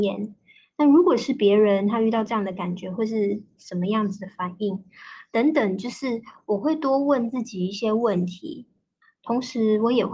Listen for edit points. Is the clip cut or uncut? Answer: cut